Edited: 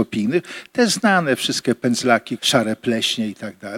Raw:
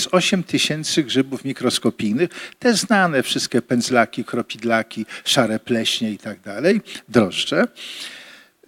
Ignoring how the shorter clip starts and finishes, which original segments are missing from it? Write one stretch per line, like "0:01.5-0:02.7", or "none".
0:04.2-0:05.2